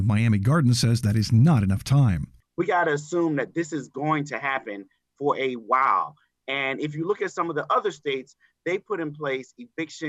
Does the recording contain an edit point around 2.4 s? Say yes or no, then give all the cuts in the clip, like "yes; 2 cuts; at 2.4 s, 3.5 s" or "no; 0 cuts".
yes; 1 cut; at 2.4 s